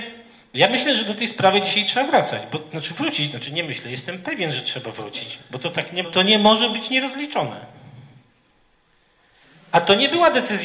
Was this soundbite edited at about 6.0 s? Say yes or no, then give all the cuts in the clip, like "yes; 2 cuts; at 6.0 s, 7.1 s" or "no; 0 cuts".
yes; 1 cut; at 6.0 s